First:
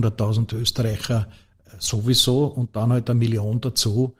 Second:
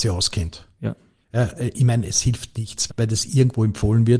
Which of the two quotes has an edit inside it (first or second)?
second